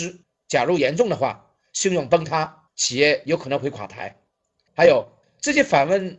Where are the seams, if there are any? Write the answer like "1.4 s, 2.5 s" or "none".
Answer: 4.7 s